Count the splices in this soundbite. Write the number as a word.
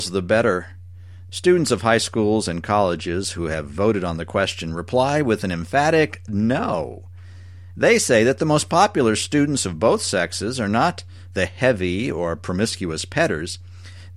one